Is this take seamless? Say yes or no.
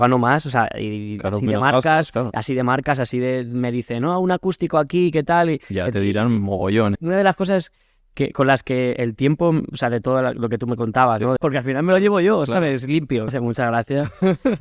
no